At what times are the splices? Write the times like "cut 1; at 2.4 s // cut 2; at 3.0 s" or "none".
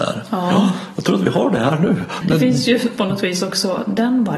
cut 1; at 2.2 s